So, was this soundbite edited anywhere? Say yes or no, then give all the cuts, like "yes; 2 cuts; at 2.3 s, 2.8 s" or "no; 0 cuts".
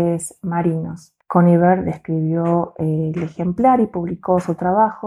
yes; 1 cut; at 1.2 s